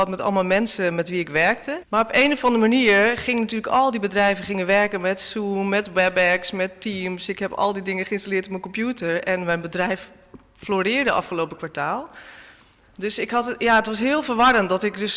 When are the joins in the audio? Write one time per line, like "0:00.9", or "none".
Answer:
0:01.8